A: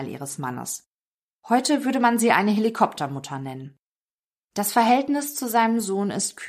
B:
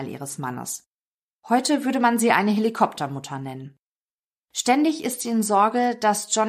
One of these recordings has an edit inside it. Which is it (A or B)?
A